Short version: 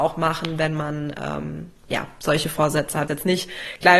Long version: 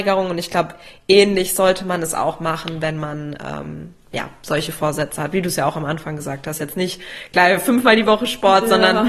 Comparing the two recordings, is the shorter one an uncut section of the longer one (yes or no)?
no